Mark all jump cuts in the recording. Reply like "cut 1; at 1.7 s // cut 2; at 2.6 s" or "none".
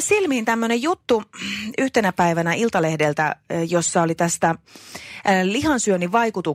none